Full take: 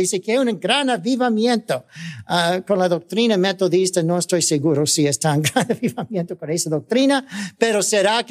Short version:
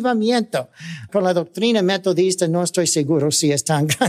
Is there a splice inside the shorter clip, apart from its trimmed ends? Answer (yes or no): yes